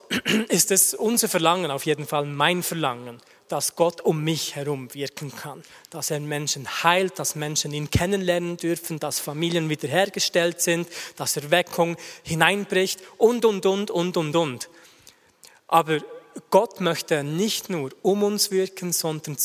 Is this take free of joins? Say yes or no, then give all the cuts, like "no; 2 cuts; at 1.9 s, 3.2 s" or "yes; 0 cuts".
yes; 0 cuts